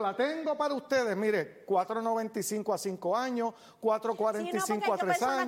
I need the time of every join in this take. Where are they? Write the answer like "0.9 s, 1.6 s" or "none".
none

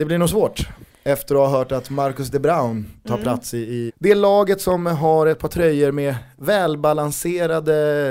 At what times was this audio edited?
3.9 s

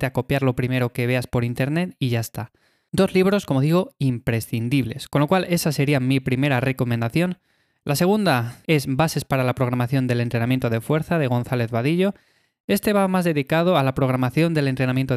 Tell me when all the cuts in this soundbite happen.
none

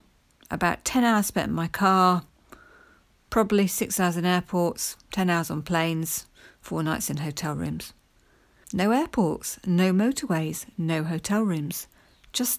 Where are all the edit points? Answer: 8.6 s

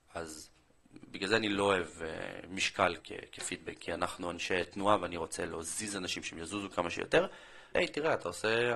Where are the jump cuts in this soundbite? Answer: 3.0 s, 7.7 s

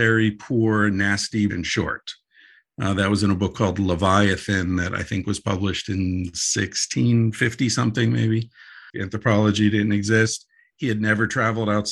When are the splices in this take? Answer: 1.5 s, 8.9 s

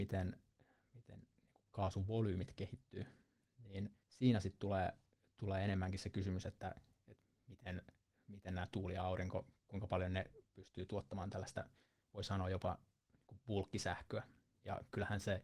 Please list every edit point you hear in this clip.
4.0 s

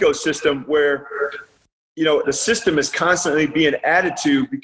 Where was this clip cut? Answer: 2.2 s

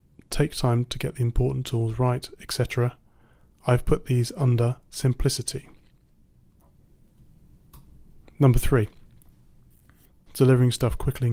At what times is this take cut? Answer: 10.3 s

